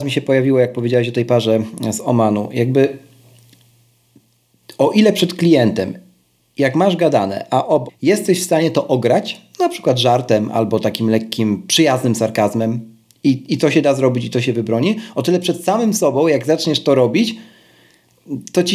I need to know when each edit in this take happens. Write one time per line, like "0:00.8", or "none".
0:07.9